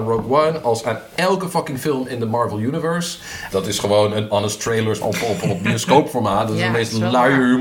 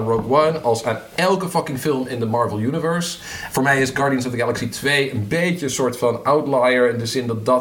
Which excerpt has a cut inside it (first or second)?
first